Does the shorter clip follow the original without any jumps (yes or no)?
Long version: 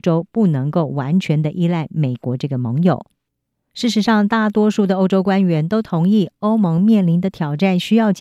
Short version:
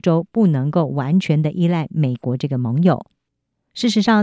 yes